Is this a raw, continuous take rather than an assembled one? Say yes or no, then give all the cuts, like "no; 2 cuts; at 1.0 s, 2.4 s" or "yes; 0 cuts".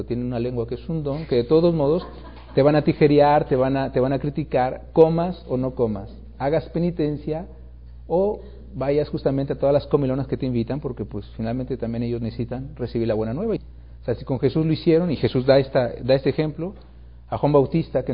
no; 1 cut; at 13.6 s